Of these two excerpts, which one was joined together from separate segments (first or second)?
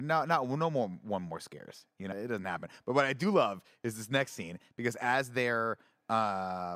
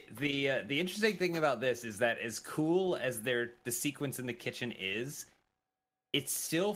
first